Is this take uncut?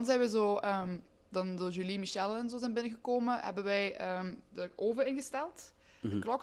yes; 0 cuts

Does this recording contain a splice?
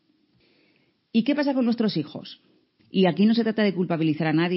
yes; 1 cut; at 2.8 s

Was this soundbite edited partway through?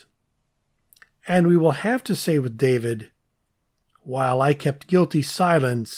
no; 0 cuts

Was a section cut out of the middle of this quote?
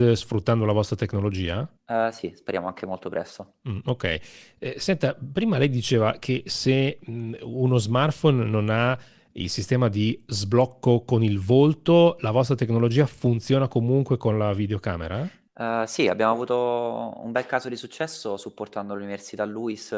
yes; 1 cut; at 1.8 s

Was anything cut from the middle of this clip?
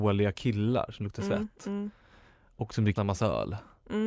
yes; 1 cut; at 3.0 s

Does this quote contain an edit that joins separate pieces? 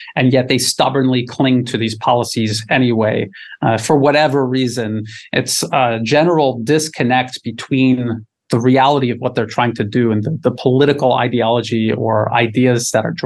no; 0 cuts

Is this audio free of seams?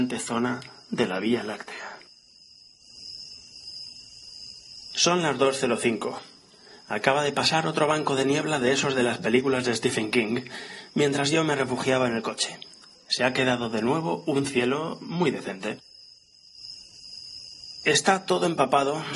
yes; 0 cuts

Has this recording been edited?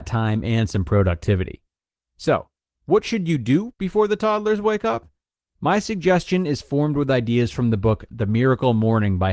no; 0 cuts

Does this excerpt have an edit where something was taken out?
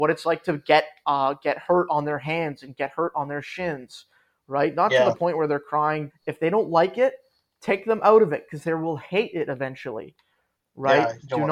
yes; 1 cut; at 6.1 s

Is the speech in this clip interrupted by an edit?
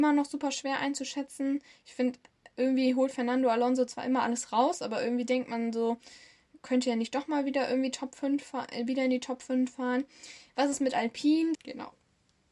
yes; 1 cut; at 11.5 s

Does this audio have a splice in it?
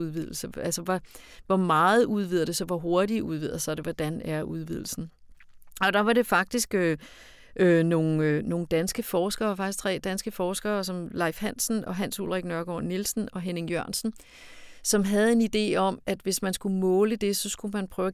no; 0 cuts

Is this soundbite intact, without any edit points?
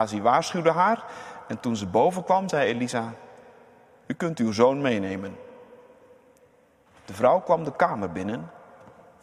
yes; 0 cuts

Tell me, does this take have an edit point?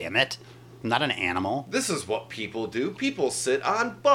no; 0 cuts

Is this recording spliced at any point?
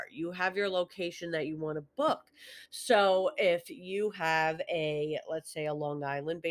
no; 0 cuts

